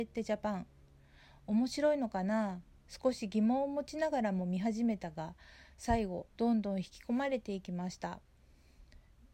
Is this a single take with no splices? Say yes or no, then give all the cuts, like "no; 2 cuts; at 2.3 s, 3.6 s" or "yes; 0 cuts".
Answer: no; 1 cut; at 6.3 s